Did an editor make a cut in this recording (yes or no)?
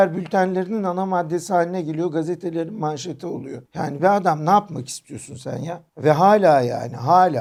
no